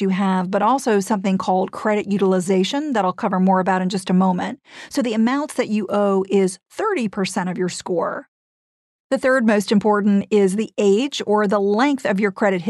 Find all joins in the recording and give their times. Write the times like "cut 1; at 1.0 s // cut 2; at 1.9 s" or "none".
none